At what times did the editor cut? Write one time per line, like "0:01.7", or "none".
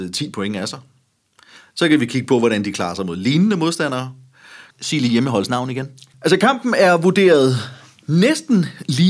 0:04.7
0:06.1